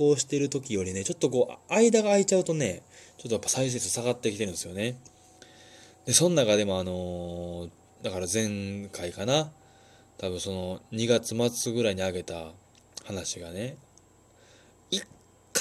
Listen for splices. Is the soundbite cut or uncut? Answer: uncut